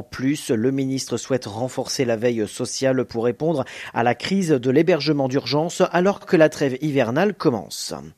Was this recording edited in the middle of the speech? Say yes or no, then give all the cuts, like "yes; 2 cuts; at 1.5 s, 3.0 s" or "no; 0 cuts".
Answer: no; 0 cuts